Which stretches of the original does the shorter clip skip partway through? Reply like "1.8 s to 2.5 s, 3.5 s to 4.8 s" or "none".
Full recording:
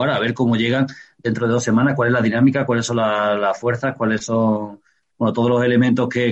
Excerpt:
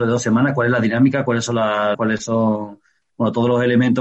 3.4 s to 3.9 s